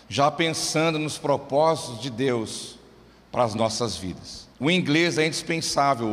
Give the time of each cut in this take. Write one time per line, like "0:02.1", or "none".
0:04.5